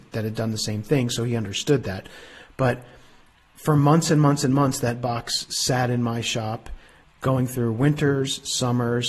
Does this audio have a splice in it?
no; 0 cuts

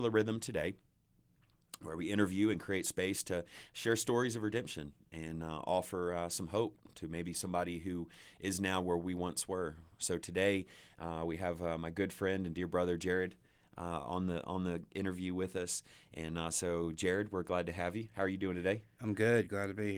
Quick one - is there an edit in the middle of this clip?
no; 0 cuts

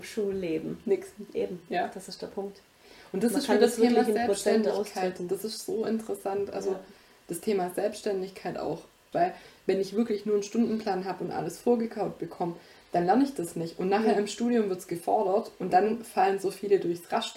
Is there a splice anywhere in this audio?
yes; 1 cut; at 9.1 s

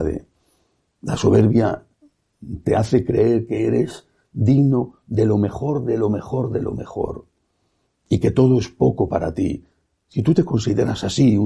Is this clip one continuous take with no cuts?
yes; 0 cuts

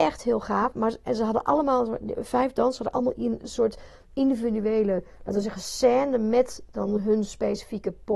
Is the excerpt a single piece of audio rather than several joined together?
yes; 0 cuts

